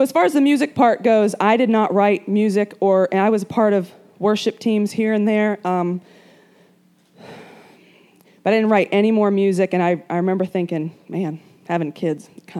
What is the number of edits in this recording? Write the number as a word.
zero